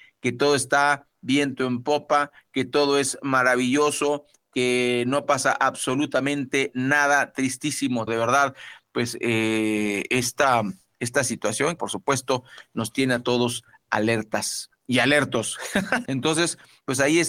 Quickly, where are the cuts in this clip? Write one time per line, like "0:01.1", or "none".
0:08.1
0:11.8
0:16.1